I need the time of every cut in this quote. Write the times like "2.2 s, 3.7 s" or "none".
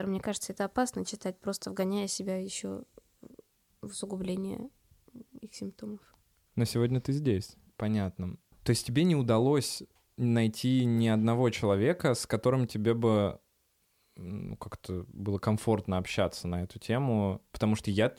7.7 s